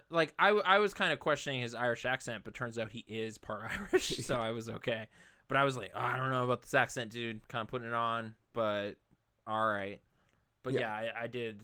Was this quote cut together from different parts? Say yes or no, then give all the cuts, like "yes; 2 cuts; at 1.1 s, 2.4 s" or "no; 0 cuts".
no; 0 cuts